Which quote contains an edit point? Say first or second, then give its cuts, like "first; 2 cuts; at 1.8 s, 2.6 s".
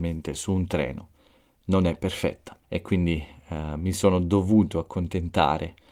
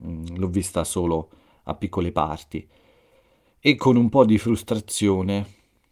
first; 1 cut; at 2.6 s